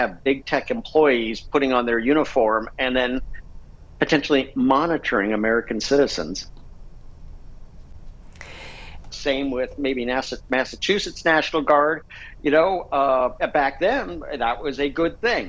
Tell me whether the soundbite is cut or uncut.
cut